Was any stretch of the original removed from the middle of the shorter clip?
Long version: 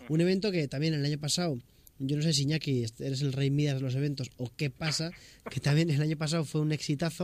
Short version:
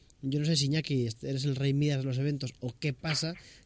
no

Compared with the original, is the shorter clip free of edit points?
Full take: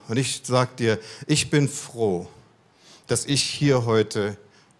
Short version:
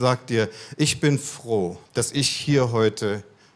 no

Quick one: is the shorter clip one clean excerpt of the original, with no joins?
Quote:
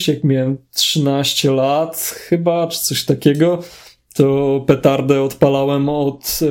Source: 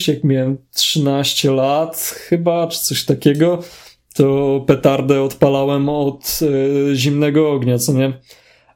yes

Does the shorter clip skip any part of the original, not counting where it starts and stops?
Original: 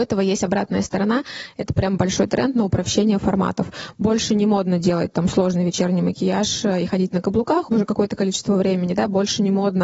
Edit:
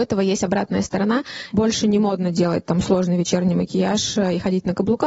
yes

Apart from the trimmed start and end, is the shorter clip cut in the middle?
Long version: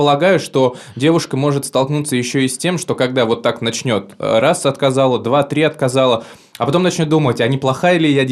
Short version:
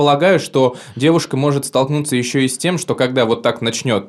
no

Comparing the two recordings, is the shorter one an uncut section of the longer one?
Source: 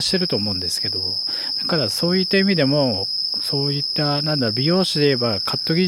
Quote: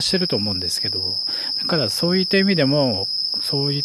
yes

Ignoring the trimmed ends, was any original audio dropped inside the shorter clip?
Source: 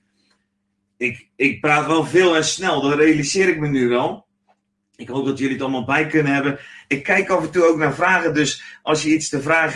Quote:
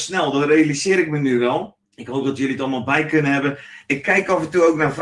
yes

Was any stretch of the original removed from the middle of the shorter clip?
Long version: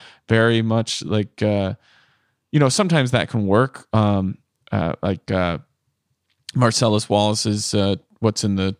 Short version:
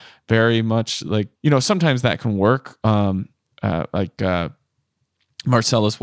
yes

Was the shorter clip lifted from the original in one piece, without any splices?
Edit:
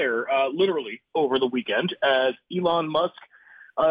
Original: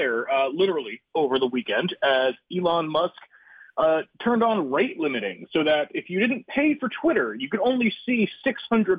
yes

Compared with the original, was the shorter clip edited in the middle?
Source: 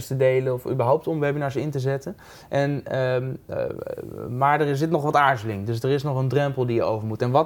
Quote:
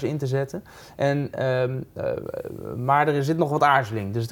no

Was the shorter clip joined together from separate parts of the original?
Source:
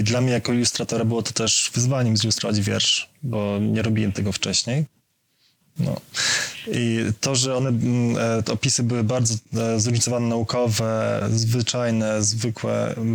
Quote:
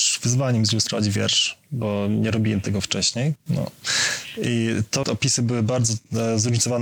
yes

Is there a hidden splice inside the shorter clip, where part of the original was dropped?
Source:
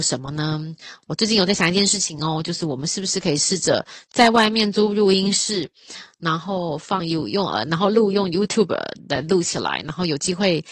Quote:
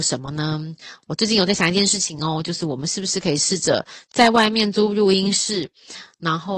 no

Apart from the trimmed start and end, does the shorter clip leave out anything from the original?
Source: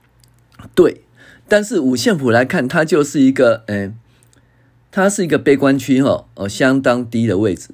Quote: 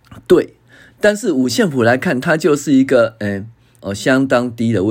yes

